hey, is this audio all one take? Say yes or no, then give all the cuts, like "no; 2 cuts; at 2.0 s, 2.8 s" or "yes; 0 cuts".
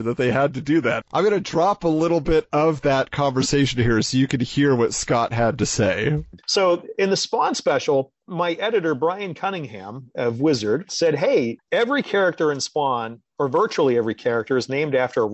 yes; 0 cuts